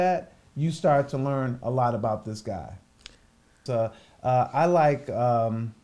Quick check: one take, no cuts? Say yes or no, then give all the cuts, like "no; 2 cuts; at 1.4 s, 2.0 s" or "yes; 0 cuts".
no; 1 cut; at 3.7 s